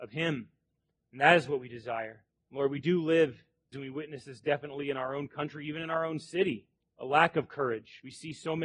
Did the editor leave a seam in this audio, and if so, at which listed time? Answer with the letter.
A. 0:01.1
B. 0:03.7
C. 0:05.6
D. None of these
B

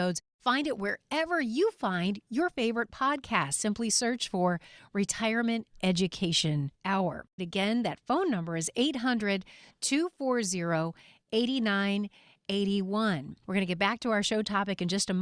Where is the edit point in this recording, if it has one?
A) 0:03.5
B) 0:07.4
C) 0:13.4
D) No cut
B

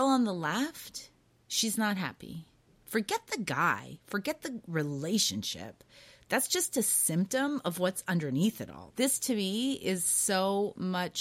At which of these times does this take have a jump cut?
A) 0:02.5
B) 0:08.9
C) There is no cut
B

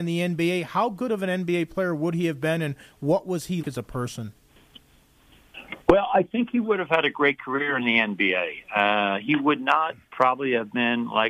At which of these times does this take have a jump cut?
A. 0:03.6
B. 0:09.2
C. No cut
A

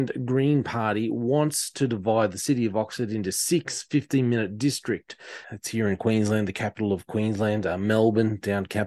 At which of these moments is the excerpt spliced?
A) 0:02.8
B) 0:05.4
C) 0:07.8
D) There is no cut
B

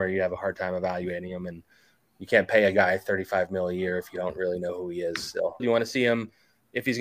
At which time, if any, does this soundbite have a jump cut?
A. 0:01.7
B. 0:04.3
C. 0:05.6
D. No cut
C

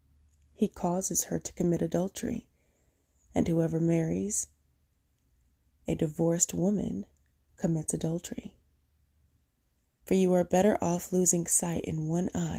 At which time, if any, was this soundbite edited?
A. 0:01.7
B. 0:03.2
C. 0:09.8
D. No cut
C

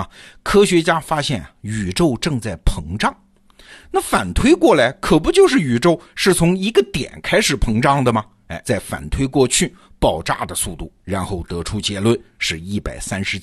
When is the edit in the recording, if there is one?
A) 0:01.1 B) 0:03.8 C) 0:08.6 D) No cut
C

